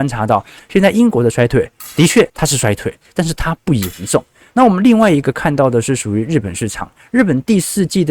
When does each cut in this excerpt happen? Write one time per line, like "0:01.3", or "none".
0:02.3